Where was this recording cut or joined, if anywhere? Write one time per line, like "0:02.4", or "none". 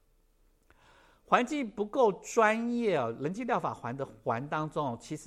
none